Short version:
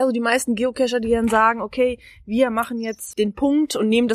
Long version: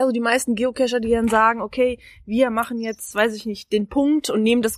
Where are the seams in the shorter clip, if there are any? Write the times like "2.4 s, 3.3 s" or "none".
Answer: 3.1 s